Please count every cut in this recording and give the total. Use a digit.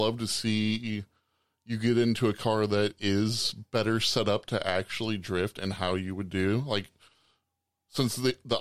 0